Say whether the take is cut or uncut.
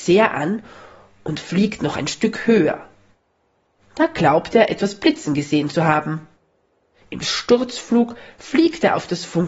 uncut